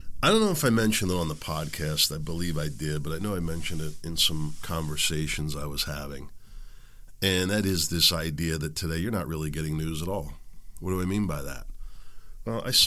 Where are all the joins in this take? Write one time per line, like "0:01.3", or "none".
none

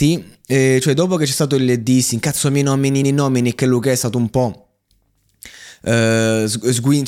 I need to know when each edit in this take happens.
0:03.0

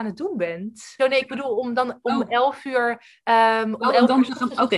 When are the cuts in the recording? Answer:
0:01.0

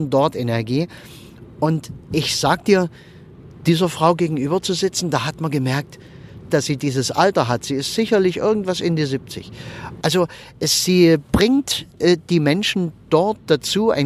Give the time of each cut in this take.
0:06.5
0:10.0

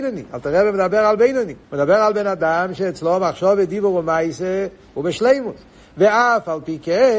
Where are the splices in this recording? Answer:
0:01.6

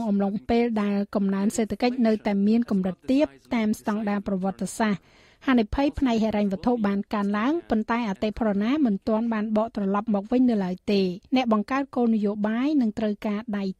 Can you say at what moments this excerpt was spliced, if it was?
0:11.3

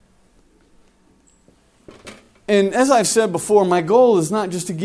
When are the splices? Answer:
none

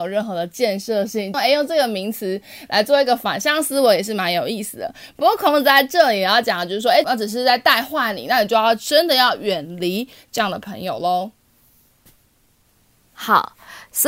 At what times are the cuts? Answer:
0:01.3
0:07.0

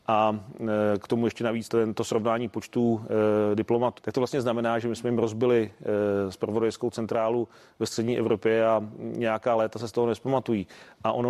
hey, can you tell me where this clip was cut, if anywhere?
0:01.7
0:04.0

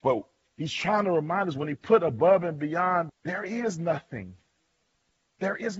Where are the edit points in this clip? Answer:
0:03.1

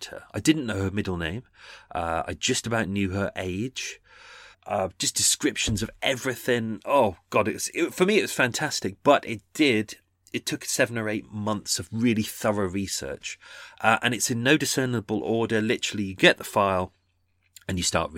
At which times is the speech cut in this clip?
0:04.5

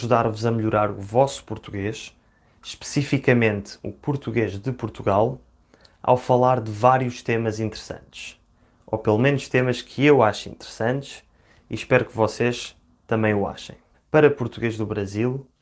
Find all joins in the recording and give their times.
0:13.9

